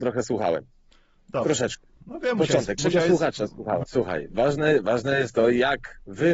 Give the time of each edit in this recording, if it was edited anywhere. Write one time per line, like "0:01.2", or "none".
0:02.8
0:03.8